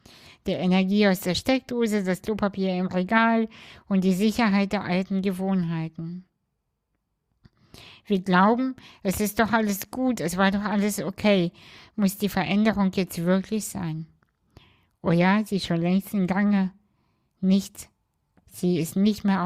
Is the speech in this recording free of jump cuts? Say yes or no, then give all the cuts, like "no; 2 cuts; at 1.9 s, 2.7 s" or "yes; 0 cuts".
yes; 0 cuts